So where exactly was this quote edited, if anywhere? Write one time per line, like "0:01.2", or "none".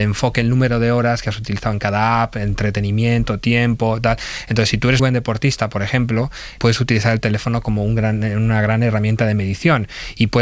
0:05.0
0:06.6